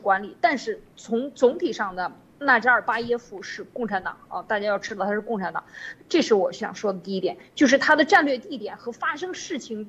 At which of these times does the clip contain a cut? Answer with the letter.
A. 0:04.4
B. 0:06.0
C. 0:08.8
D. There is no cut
B